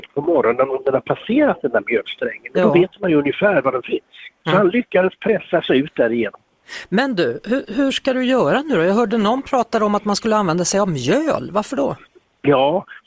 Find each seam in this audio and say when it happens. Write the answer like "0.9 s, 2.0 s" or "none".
4.4 s